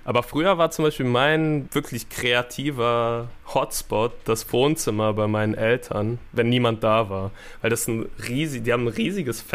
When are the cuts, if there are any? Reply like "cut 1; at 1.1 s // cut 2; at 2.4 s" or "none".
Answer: cut 1; at 1.7 s